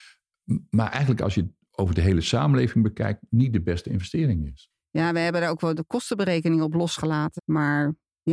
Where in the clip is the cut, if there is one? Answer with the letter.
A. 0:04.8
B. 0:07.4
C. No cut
B